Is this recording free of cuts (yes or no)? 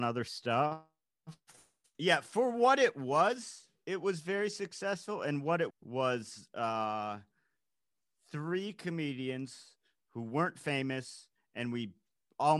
no